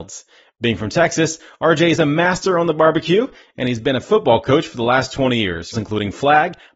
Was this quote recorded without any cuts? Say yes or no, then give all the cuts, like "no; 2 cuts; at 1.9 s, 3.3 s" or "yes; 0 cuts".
no; 1 cut; at 5.7 s